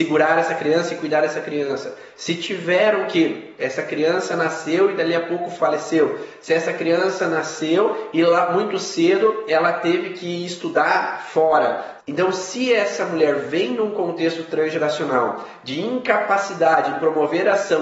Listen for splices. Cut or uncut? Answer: cut